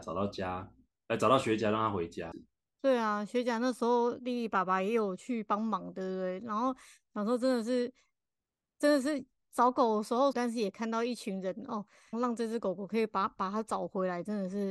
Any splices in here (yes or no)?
yes